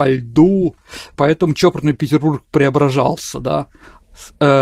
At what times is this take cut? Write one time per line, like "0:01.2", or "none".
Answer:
0:01.1

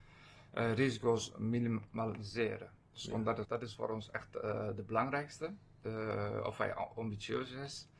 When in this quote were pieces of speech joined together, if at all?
0:03.4

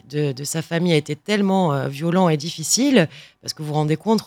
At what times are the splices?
none

